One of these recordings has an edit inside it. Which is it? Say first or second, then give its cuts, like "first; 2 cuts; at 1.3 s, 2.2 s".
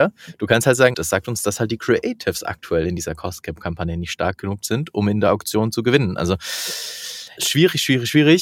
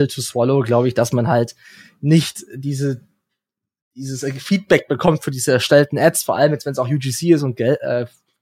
first; 2 cuts; at 0.9 s, 7.4 s